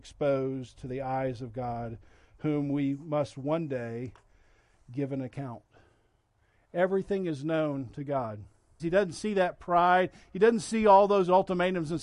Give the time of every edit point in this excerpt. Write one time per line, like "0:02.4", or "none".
0:08.8